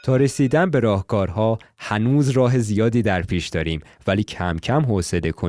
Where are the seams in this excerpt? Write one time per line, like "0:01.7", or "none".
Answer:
0:04.0